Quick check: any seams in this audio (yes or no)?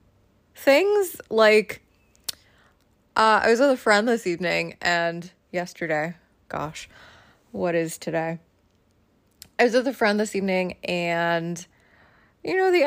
no